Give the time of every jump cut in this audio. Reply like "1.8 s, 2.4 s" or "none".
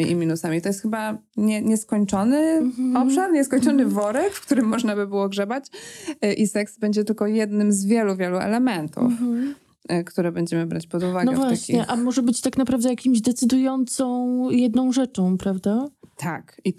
none